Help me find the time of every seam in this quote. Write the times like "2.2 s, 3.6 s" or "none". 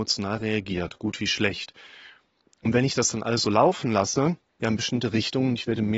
4.6 s